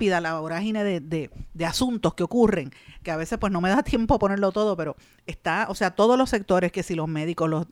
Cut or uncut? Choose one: uncut